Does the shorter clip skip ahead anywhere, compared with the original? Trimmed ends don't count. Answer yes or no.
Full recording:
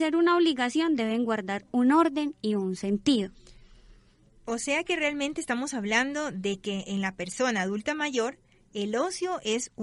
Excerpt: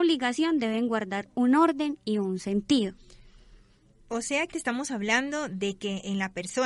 yes